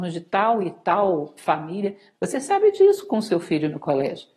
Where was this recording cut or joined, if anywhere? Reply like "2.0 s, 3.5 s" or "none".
2.1 s